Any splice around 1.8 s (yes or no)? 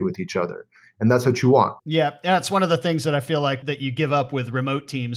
yes